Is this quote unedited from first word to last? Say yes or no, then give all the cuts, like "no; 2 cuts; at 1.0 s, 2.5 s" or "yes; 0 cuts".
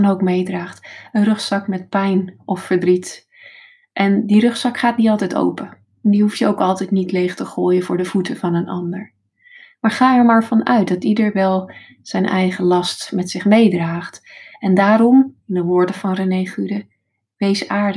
yes; 0 cuts